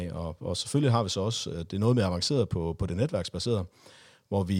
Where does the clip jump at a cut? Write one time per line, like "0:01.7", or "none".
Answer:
none